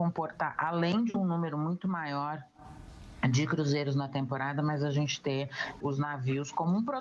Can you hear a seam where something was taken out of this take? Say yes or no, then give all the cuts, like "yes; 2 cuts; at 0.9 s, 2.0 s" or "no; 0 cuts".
yes; 1 cut; at 5.8 s